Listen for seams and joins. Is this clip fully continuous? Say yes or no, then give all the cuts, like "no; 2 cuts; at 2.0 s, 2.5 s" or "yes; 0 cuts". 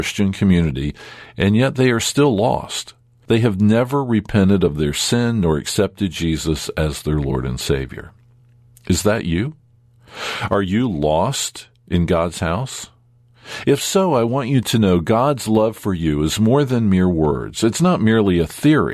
yes; 0 cuts